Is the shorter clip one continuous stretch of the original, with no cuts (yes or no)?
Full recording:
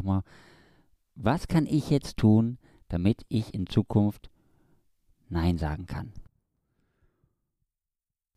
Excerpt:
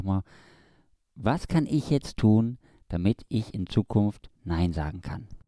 no